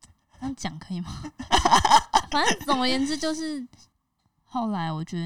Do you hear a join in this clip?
yes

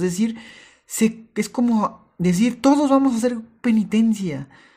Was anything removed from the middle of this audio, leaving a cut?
no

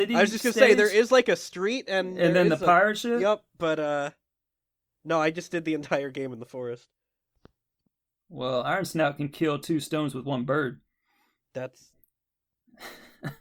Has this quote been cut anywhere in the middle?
no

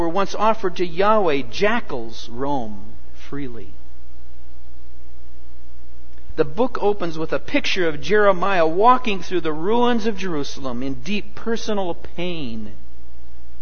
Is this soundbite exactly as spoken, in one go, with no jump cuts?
no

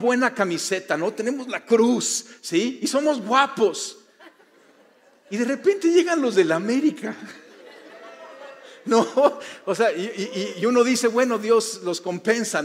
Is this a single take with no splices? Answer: yes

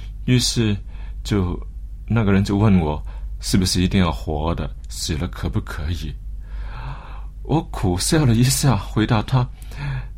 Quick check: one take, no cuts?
yes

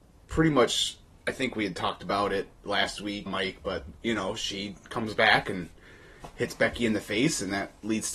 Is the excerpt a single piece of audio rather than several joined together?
no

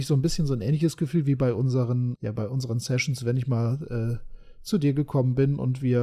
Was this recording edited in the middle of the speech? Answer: yes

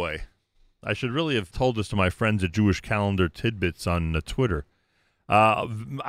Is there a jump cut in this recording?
yes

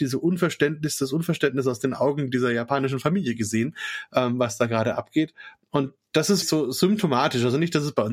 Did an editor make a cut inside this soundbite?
yes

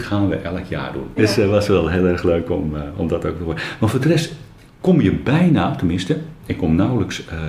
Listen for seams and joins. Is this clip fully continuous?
no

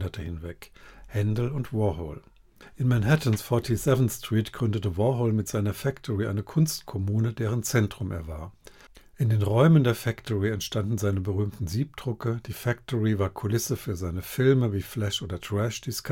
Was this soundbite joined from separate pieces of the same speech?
no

